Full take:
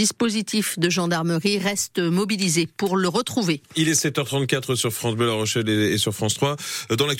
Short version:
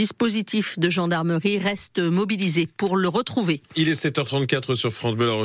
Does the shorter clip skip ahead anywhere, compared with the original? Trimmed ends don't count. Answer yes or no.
no